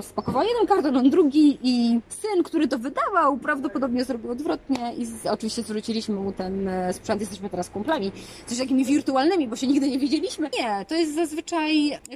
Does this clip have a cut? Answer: yes; 1 cut; at 10.5 s

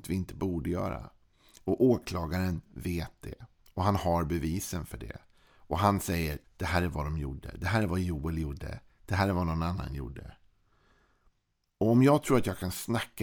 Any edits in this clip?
yes; 1 cut; at 6.4 s

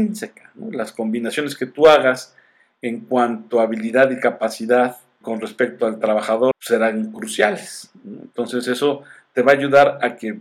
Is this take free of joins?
no; 2 cuts; at 5.2 s, 6.5 s

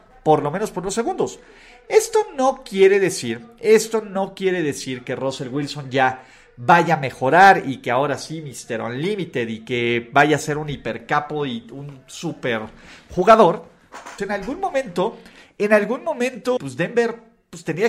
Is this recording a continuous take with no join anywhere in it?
no; 2 cuts; at 14.2 s, 16.6 s

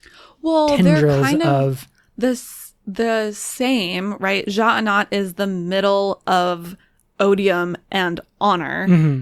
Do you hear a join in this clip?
no; 0 cuts

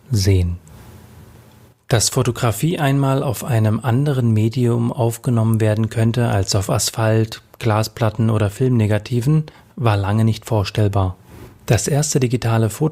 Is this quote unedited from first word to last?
yes; 0 cuts

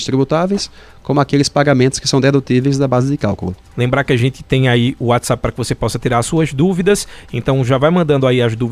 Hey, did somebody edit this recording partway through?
yes; 1 cut; at 3.7 s

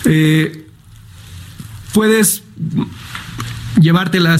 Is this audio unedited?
yes; 0 cuts

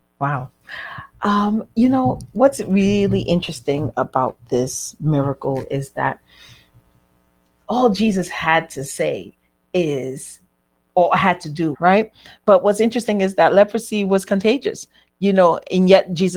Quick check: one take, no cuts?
no; 1 cut; at 11.7 s

